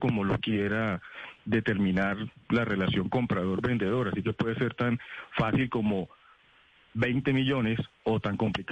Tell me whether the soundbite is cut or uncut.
uncut